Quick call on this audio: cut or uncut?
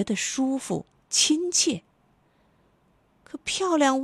uncut